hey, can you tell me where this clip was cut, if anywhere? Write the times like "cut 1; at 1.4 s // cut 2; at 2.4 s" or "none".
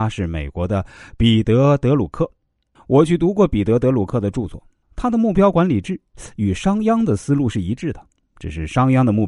cut 1; at 2.8 s // cut 2; at 4.8 s